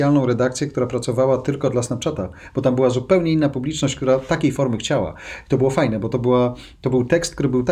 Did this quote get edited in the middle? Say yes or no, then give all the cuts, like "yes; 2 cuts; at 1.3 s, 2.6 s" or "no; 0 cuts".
no; 0 cuts